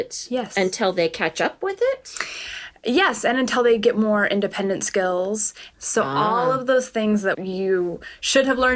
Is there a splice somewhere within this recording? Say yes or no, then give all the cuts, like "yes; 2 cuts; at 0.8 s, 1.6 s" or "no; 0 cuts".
yes; 1 cut; at 5.7 s